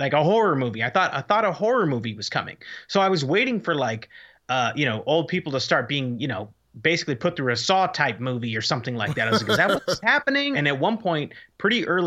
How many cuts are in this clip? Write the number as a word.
one